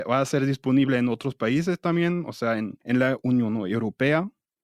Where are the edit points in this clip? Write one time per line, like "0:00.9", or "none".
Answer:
0:02.8